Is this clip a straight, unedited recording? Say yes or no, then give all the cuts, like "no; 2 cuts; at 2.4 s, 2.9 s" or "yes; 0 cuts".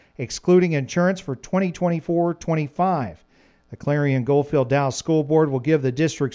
yes; 0 cuts